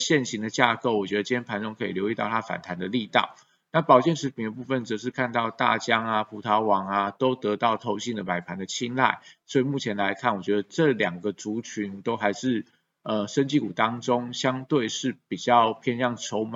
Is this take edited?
no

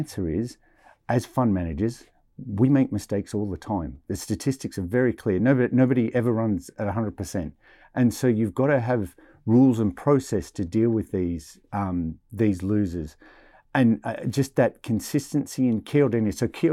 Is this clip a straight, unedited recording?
yes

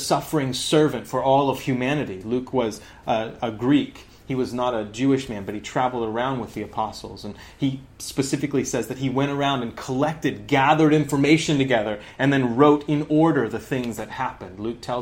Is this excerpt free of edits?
yes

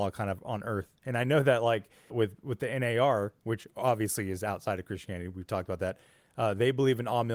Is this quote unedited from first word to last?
no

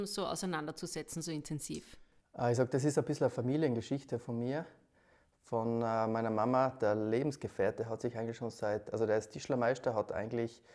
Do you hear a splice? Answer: no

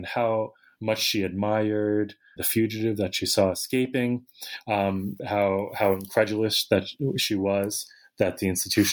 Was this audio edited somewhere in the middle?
yes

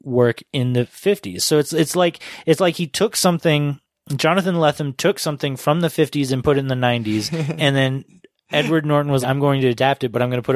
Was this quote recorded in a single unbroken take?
no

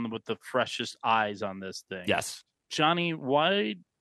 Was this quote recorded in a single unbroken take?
no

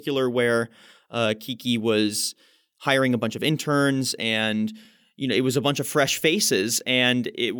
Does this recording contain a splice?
no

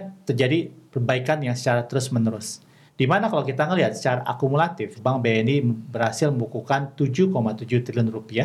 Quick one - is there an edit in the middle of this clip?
yes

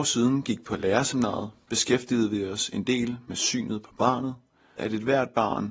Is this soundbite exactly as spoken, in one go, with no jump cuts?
no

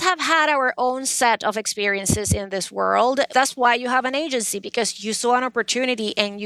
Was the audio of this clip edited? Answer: yes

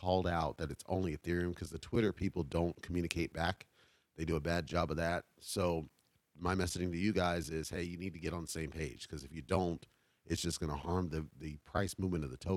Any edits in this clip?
no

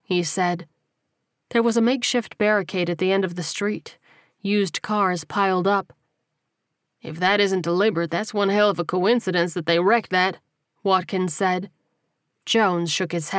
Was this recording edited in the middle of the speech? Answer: yes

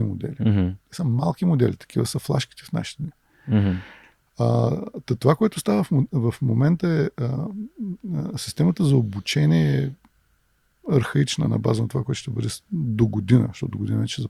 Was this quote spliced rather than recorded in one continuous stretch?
no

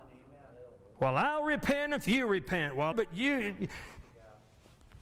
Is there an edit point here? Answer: yes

